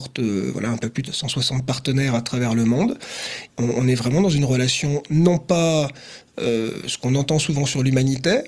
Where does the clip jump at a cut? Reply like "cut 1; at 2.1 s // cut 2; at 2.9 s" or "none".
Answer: cut 1; at 1.0 s // cut 2; at 3.5 s